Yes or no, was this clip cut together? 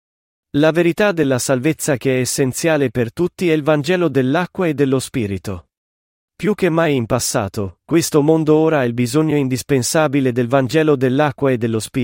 yes